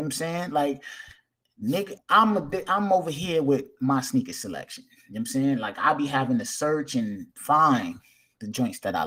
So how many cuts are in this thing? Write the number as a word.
one